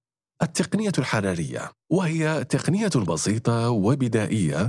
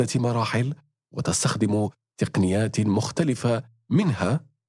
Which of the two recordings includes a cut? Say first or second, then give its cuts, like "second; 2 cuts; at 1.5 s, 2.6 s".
first; 1 cut; at 1.8 s